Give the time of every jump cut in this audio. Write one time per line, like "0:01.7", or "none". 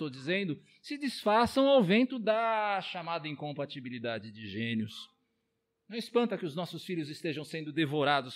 none